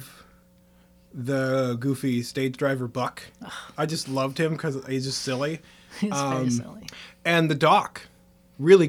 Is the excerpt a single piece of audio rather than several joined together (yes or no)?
yes